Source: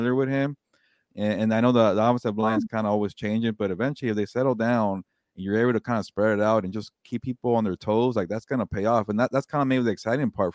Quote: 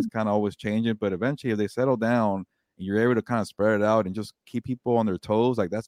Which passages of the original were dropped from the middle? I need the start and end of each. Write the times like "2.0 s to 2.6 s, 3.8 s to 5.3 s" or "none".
none